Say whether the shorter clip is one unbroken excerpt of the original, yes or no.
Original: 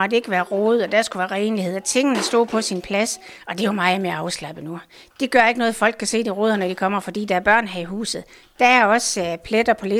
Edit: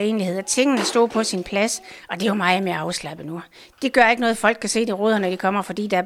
yes